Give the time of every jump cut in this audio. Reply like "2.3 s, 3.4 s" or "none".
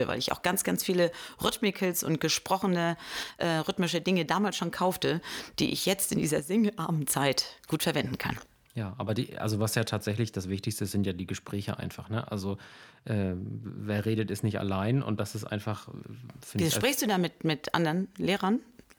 none